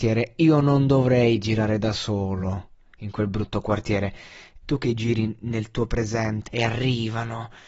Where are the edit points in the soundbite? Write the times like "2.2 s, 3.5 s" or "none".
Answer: 4.6 s, 6.5 s